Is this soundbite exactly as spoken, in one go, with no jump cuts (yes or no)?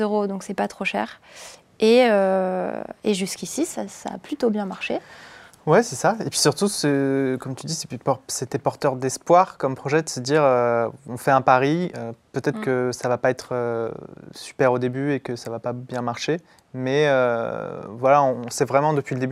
yes